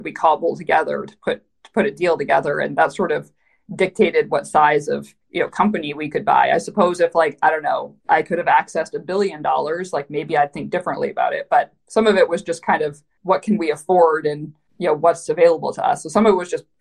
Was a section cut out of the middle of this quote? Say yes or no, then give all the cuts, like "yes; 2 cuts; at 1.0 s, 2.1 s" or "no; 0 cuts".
yes; 2 cuts; at 5.2 s, 8.0 s